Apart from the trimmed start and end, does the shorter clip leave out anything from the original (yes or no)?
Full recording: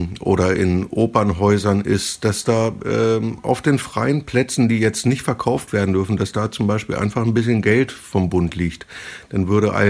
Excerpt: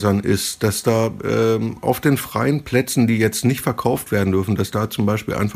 no